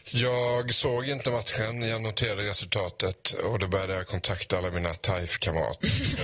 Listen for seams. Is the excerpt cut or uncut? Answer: uncut